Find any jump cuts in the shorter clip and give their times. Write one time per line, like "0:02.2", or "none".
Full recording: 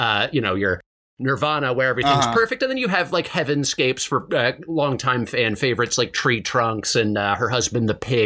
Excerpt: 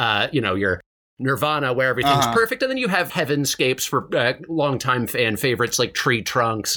0:03.1